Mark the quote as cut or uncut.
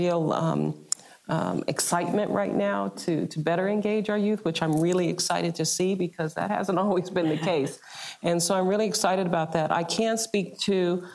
uncut